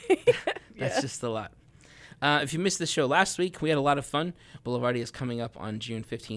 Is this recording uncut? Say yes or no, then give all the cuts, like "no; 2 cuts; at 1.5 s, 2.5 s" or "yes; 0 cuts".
no; 1 cut; at 4.6 s